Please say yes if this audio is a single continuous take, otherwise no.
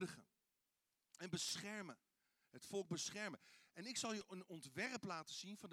yes